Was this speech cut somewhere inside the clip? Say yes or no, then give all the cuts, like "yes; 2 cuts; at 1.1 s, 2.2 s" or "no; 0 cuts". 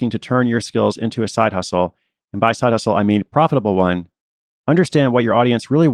yes; 1 cut; at 4.5 s